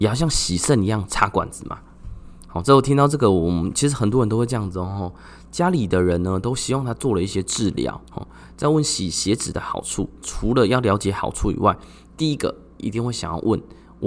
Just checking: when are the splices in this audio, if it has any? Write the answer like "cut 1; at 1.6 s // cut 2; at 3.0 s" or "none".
cut 1; at 8.0 s // cut 2; at 10.2 s

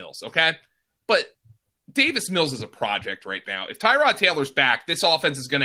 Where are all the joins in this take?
cut 1; at 1.0 s

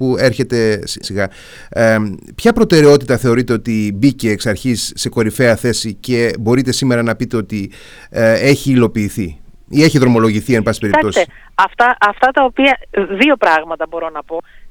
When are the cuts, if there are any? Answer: cut 1; at 1.0 s

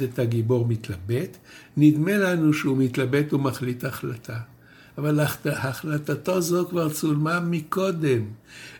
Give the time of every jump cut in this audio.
none

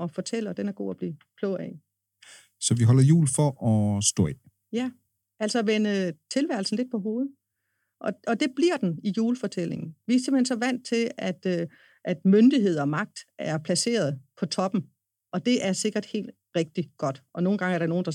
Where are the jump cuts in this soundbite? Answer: none

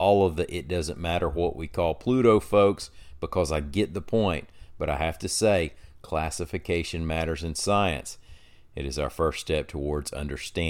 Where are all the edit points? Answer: none

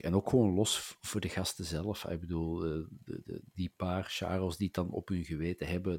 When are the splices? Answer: cut 1; at 3.5 s

